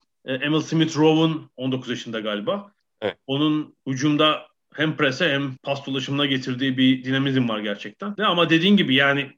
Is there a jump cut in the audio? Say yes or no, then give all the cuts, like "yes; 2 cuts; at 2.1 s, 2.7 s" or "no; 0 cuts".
yes; 2 cuts; at 3.8 s, 8.2 s